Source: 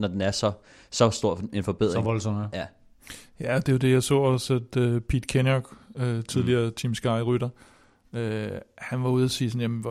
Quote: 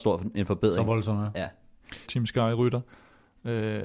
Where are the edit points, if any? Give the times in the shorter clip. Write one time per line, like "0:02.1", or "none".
0:02.1